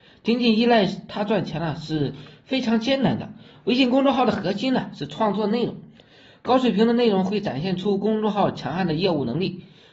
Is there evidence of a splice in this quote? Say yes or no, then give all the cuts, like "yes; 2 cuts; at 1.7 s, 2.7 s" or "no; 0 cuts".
no; 0 cuts